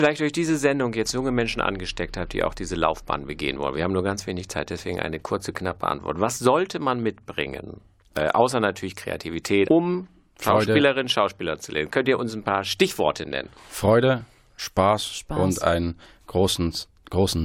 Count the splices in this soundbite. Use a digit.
1